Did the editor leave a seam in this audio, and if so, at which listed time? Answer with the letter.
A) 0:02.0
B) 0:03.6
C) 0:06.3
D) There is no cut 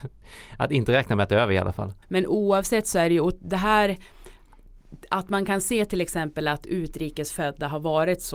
A